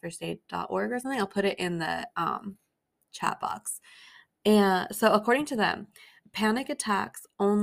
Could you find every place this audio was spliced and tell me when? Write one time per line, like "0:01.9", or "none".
none